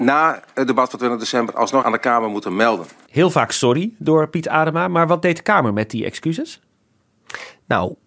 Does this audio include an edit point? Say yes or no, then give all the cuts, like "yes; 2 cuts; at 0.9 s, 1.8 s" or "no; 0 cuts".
yes; 2 cuts; at 1.8 s, 3.1 s